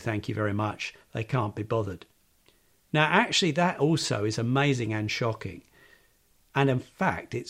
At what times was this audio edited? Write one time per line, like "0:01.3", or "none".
none